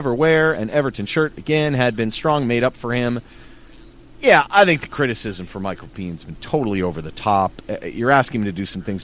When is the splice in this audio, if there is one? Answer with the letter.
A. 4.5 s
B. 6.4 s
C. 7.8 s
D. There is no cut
A